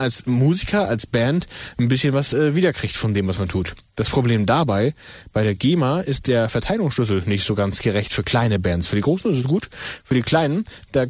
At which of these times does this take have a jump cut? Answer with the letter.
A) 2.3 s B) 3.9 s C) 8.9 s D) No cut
D